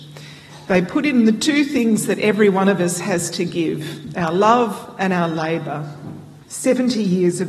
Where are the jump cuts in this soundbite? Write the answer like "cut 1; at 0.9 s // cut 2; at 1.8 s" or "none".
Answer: cut 1; at 6.4 s